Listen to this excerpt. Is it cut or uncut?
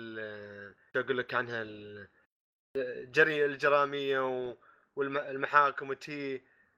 uncut